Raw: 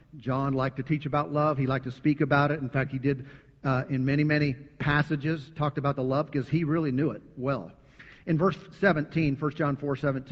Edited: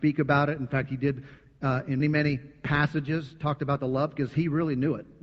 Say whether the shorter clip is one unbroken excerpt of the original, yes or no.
no